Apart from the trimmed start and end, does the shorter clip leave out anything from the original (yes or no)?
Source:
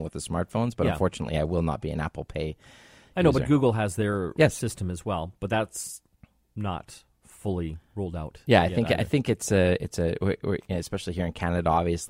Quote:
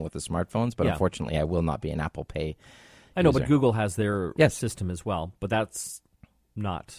no